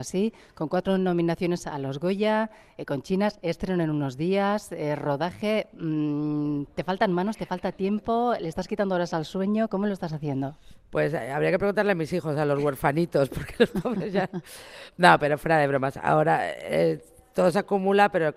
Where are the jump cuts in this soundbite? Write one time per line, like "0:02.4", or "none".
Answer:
none